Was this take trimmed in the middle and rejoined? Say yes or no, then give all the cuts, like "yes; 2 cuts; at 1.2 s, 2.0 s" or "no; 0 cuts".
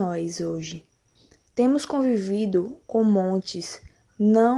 no; 0 cuts